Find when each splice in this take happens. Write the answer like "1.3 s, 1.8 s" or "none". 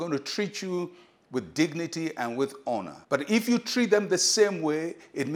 3.0 s